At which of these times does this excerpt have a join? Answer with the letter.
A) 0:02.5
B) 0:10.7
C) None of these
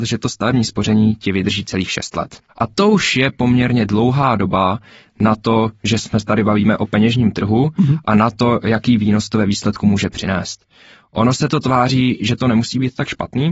A